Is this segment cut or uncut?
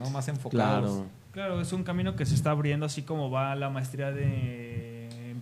uncut